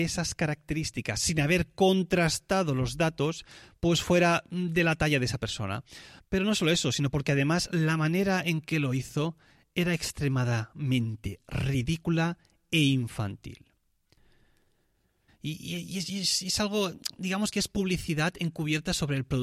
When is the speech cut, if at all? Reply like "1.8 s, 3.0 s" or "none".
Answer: 6.2 s, 15.3 s